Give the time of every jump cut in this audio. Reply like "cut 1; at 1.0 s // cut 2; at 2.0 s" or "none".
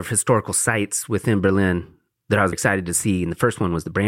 cut 1; at 2.5 s